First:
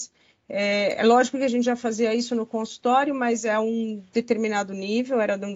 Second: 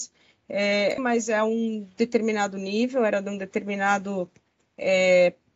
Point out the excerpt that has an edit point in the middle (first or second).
second